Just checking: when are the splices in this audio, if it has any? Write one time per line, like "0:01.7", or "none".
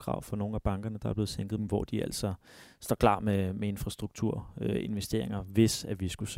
0:01.6